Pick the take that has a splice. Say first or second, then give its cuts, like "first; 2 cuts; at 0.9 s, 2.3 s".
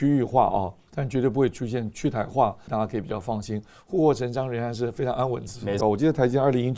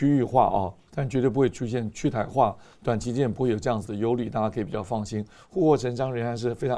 first; 2 cuts; at 2.7 s, 5.8 s